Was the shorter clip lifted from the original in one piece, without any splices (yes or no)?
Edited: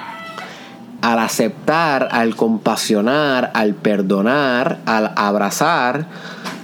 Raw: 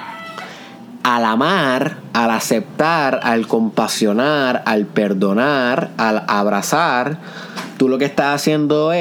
no